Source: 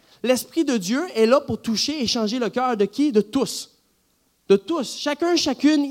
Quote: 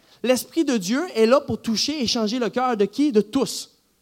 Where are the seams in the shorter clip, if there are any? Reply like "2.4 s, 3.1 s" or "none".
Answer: none